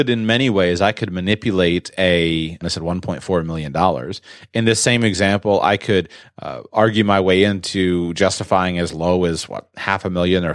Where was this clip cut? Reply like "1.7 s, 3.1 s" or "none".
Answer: 2.6 s